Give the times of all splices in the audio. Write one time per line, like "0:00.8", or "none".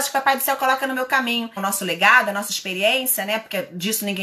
0:01.6

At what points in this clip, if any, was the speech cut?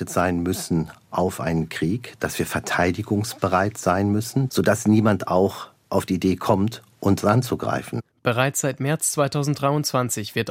0:04.5

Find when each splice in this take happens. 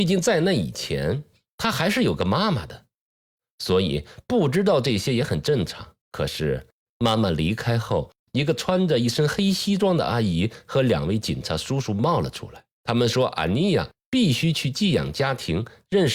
0:06.0
0:12.7

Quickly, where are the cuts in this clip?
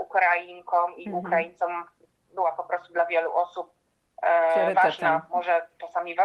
none

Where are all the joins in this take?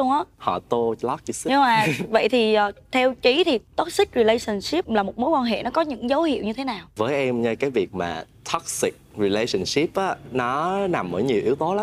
none

